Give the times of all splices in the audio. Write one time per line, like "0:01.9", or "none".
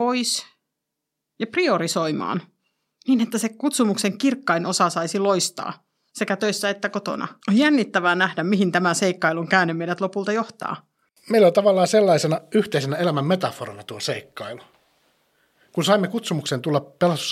0:07.4

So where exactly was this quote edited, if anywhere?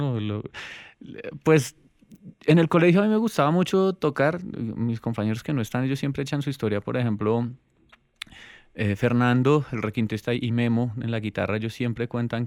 none

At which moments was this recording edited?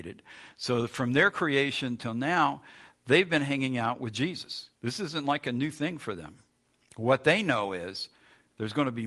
0:04.7

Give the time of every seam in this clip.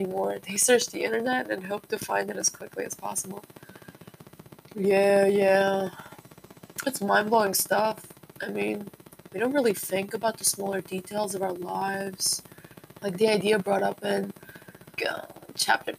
0:13.0
0:15.0

